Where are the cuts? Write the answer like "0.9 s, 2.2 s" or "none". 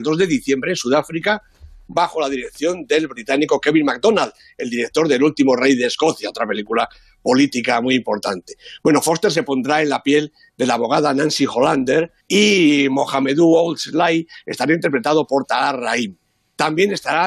12.2 s